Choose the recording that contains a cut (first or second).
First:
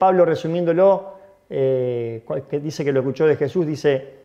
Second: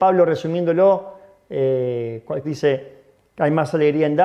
second